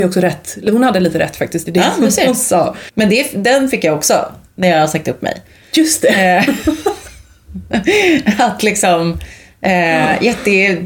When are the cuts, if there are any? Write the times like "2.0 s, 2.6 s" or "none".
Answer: none